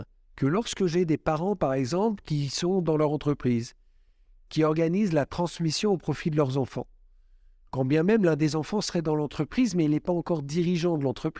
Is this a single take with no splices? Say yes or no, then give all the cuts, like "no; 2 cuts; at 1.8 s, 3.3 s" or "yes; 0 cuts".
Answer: no; 1 cut; at 4.5 s